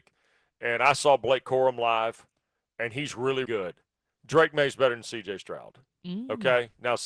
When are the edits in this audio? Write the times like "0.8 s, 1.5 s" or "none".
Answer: 3.4 s

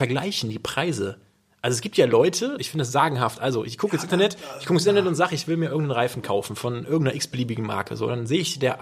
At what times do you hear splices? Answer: 2.6 s

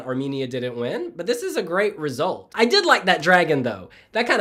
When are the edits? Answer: 2.5 s

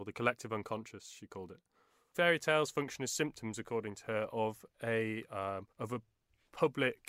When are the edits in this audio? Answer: 2.1 s, 5.7 s

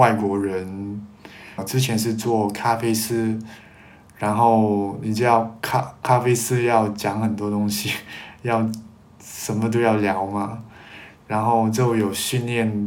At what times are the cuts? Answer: 1.6 s

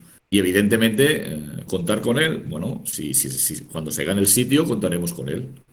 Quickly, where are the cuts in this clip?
1.7 s

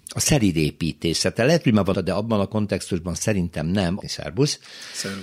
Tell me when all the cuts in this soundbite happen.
1.9 s, 4.0 s

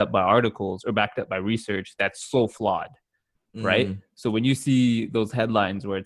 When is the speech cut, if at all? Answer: none

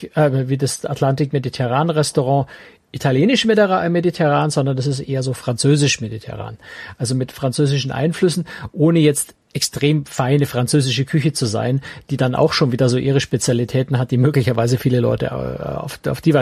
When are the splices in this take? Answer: 9.4 s

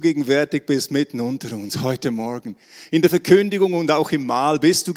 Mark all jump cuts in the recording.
none

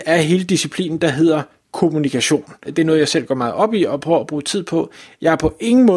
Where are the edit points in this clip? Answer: 2.6 s

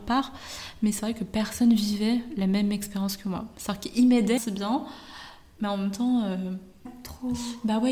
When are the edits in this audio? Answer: 4.4 s, 6.9 s

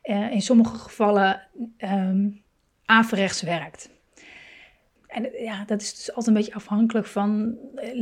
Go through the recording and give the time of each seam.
5.0 s

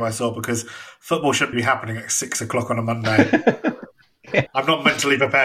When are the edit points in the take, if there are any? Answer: 1.5 s, 4.5 s

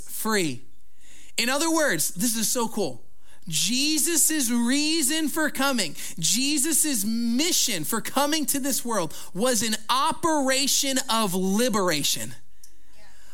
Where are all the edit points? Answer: none

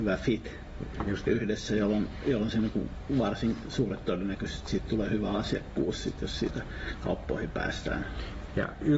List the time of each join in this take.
none

